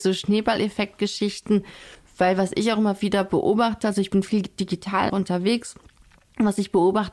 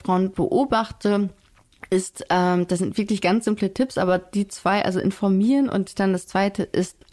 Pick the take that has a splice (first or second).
first